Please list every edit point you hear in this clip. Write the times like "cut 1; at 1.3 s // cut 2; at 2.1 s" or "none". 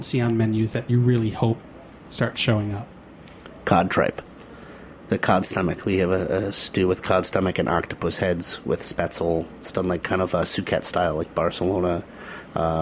none